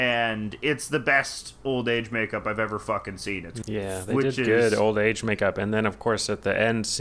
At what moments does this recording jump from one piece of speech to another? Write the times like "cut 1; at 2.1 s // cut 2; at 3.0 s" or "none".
cut 1; at 3.6 s